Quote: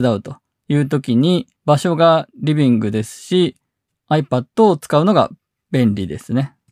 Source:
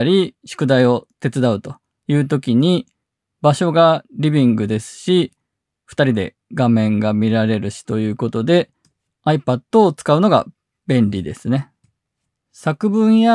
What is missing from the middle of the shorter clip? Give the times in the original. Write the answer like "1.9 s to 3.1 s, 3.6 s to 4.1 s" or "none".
3.0 s to 3.3 s, 5.6 s to 9.0 s